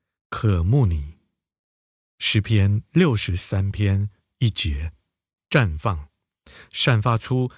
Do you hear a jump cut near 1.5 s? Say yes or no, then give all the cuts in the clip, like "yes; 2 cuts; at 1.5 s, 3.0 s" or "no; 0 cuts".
no; 1 cut; at 5.4 s